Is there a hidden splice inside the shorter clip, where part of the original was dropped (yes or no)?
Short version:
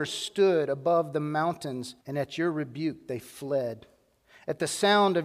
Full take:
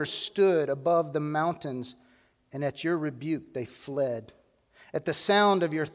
yes